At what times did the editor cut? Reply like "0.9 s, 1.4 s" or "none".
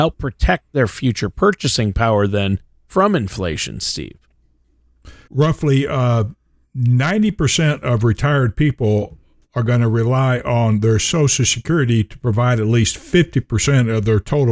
5.3 s